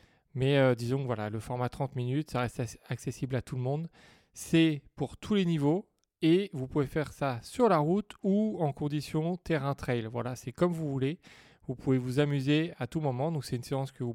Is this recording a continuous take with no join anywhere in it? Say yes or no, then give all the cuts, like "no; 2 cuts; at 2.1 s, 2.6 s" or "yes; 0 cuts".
yes; 0 cuts